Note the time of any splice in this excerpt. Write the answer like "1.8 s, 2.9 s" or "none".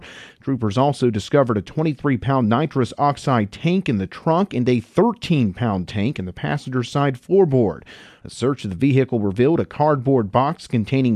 8.2 s